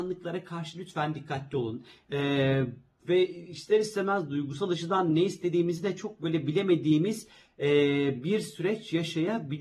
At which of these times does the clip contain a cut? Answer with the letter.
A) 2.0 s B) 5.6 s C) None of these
A